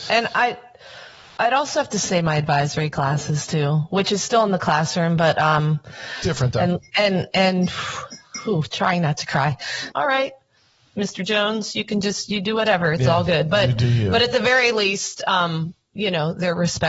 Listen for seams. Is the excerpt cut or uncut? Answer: cut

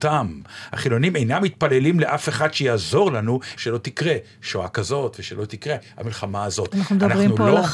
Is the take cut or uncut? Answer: cut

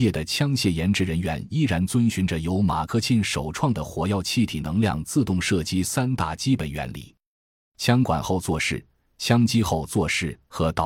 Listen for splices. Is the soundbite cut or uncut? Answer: uncut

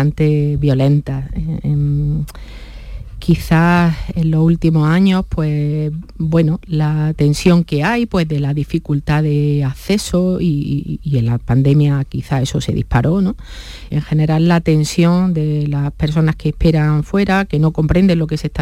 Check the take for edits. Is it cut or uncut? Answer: cut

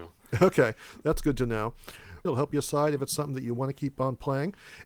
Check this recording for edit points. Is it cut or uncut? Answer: cut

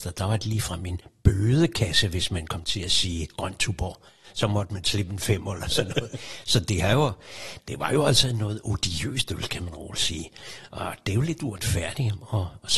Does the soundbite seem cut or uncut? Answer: uncut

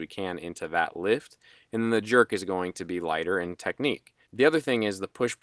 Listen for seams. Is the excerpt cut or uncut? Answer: cut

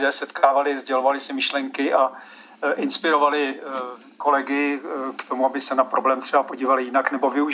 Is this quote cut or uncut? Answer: uncut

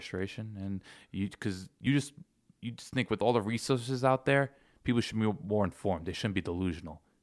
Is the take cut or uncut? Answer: uncut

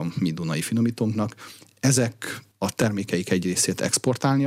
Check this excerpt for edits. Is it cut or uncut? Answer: uncut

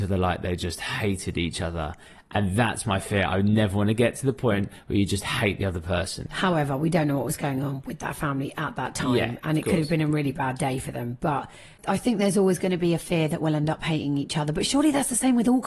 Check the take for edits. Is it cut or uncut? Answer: uncut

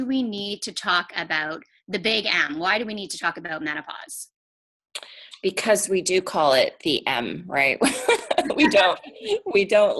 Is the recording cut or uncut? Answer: uncut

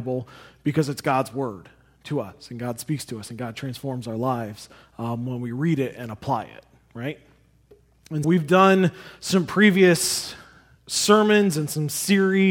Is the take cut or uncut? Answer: cut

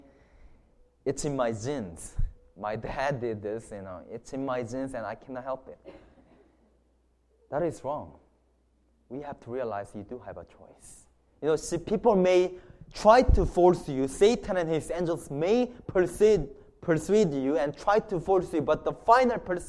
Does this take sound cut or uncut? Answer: uncut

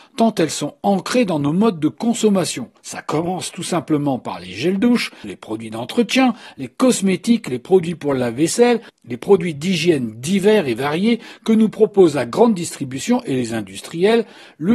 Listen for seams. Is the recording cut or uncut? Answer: cut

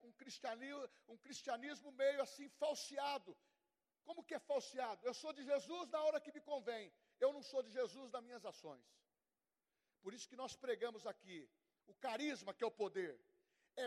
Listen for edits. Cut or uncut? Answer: uncut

